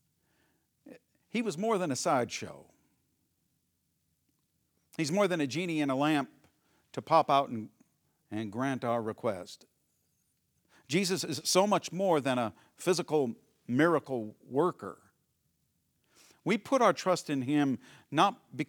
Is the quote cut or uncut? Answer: uncut